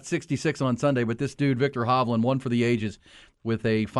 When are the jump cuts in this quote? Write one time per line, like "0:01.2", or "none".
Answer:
none